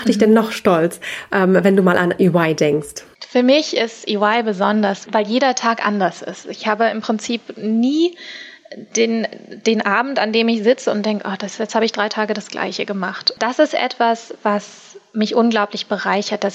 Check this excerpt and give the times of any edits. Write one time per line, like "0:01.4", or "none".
none